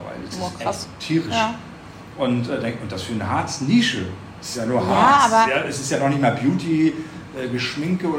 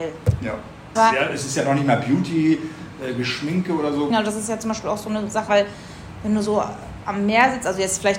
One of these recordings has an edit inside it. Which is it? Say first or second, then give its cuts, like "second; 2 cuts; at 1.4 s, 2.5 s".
second; 3 cuts; at 1.0 s, 4.1 s, 5.5 s